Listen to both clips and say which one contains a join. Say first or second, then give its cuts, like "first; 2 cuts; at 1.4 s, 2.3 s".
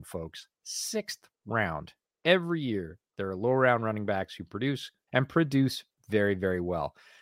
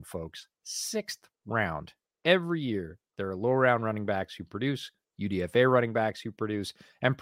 first; 1 cut; at 5.1 s